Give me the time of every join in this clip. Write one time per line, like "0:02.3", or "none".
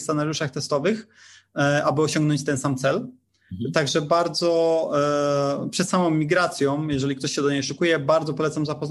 none